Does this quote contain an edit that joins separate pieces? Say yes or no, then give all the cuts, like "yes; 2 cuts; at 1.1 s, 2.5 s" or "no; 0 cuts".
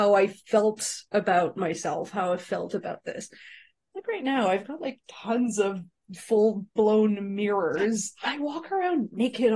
no; 0 cuts